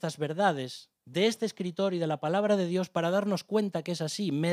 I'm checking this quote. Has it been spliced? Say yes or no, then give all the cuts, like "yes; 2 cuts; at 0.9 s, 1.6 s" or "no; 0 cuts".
yes; 1 cut; at 1.0 s